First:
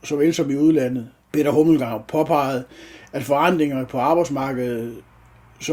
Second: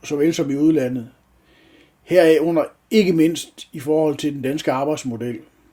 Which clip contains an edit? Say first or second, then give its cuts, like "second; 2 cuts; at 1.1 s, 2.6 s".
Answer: first; 1 cut; at 1.3 s